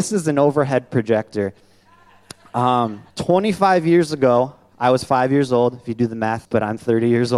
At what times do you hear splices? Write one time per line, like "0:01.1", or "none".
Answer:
0:03.1
0:06.4